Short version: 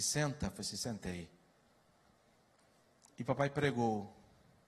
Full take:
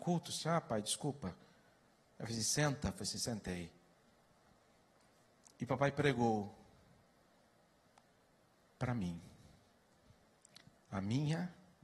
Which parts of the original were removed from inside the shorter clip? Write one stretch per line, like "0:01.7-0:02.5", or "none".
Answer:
none